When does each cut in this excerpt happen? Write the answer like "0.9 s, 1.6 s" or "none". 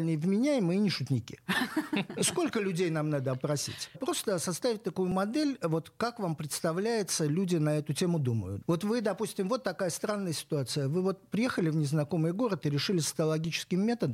3.9 s, 8.6 s

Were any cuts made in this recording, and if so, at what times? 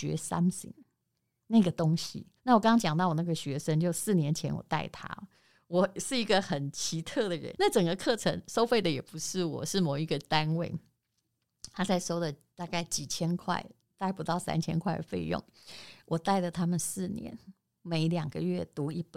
2.4 s, 7.5 s

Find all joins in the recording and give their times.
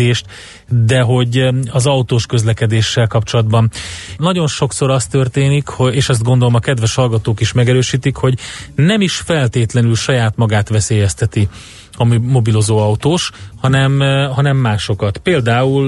4.2 s

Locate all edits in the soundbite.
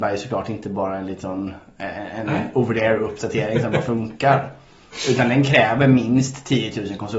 none

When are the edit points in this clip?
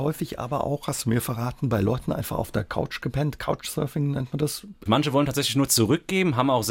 4.9 s

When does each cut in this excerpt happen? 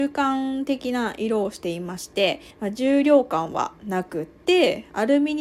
2.5 s

